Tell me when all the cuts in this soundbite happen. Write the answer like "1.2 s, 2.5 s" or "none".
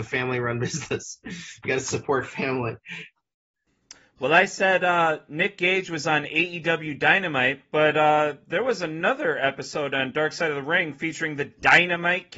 none